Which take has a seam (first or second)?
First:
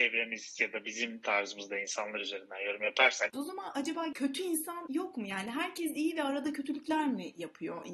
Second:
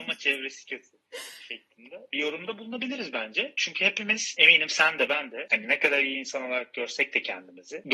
first